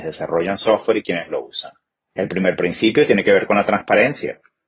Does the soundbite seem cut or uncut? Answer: uncut